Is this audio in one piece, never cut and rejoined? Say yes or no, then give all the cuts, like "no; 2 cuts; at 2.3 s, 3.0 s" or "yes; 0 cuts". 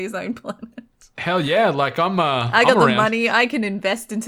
yes; 0 cuts